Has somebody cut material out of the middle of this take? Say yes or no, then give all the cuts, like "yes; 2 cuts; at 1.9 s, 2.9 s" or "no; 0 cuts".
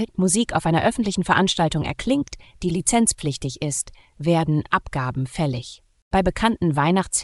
no; 0 cuts